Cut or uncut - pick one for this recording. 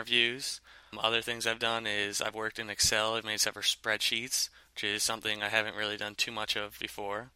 uncut